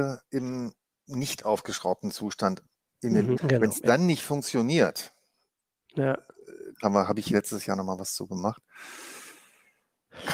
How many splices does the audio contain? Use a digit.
2